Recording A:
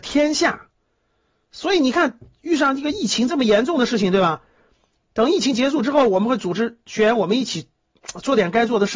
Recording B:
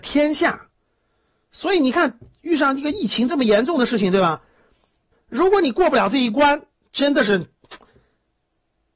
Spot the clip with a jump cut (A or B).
B